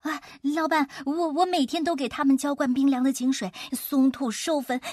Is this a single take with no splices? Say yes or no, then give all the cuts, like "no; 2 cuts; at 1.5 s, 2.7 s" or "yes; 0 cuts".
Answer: no; 1 cut; at 3.7 s